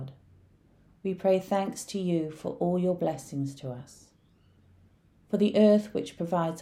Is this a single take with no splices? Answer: yes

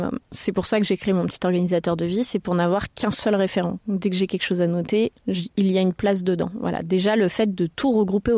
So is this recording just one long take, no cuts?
no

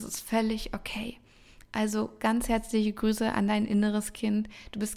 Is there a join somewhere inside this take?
no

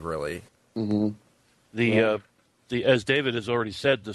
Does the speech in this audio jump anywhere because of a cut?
no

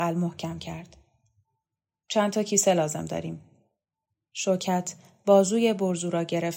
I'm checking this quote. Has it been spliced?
no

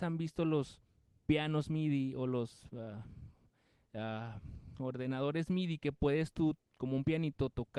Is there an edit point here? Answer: no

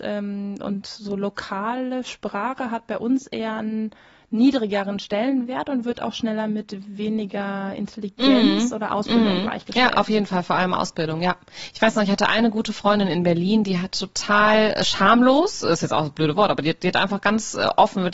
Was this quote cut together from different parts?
no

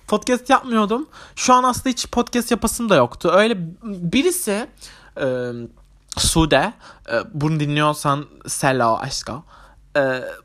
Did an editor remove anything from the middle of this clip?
no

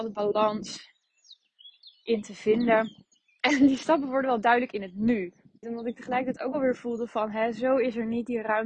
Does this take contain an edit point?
yes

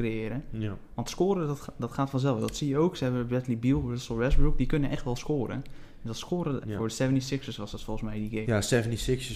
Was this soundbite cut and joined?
yes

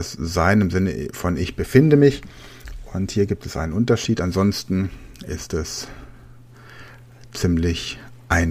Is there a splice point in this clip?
no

